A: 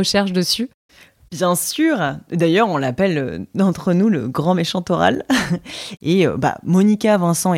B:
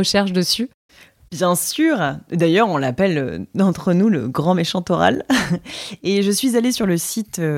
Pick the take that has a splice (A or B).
A